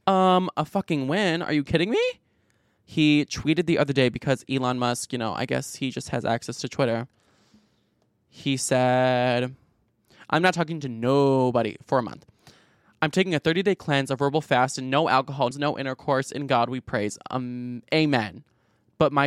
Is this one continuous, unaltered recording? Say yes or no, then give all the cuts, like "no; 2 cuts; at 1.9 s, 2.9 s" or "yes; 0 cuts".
no; 1 cut; at 15.5 s